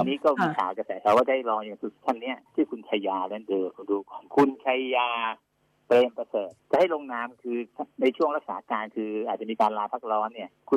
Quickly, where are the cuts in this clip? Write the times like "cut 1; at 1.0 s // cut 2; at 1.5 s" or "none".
none

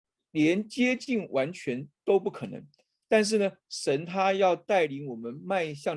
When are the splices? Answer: none

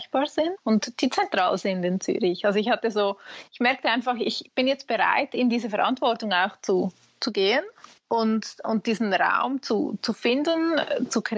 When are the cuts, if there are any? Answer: none

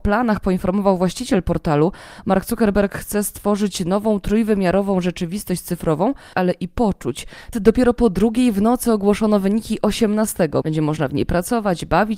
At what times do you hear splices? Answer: cut 1; at 6.3 s // cut 2; at 7.5 s // cut 3; at 10.6 s

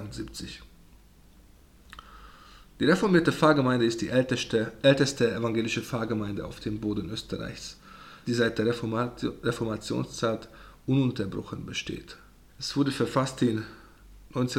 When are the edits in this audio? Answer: cut 1; at 8.2 s // cut 2; at 12.5 s

